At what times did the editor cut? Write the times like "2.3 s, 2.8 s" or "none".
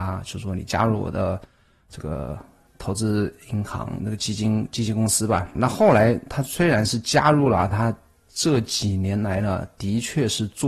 5.5 s